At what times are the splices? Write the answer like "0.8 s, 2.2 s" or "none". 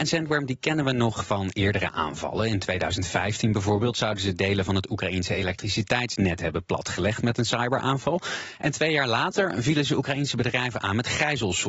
none